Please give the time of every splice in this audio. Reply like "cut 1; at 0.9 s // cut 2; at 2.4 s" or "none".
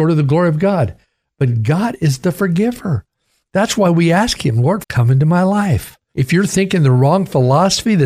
cut 1; at 4.8 s // cut 2; at 6.1 s